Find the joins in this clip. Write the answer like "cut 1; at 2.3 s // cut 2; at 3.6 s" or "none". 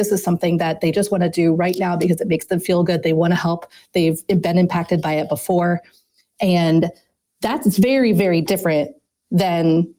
none